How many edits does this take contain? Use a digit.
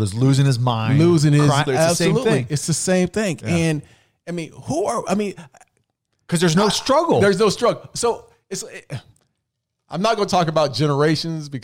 1